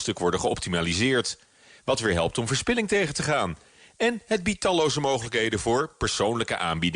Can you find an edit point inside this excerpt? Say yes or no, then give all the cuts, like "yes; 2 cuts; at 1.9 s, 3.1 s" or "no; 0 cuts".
no; 0 cuts